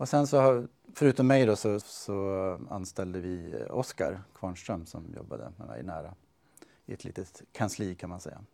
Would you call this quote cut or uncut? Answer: cut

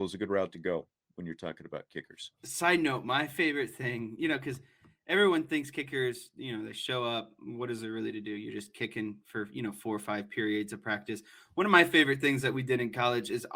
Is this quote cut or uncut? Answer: uncut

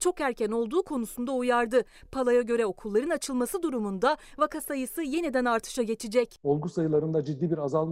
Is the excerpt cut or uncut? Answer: uncut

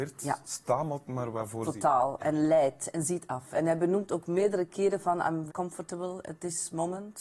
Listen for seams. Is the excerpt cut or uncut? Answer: cut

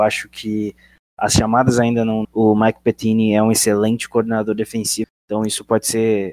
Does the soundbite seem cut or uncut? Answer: cut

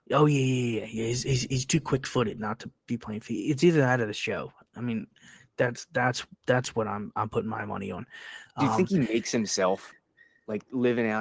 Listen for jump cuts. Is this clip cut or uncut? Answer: uncut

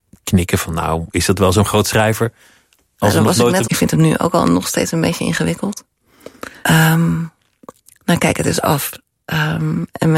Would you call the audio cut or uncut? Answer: cut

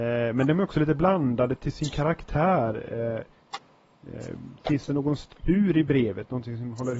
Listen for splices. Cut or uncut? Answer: uncut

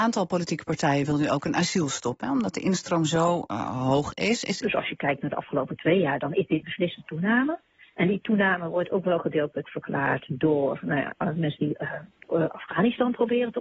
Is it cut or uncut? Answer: cut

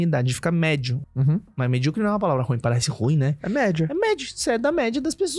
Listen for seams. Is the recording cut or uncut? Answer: cut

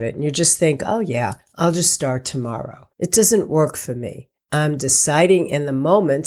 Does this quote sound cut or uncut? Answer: cut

